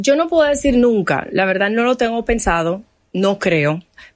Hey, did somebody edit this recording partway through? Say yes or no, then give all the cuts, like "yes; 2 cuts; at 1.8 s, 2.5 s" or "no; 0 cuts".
no; 0 cuts